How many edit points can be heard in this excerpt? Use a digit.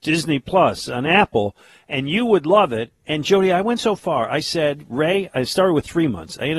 0